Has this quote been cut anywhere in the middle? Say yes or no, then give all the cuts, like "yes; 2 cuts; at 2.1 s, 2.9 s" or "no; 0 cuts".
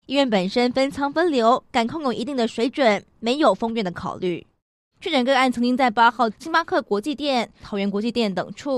yes; 3 cuts; at 4.9 s, 6.3 s, 7.6 s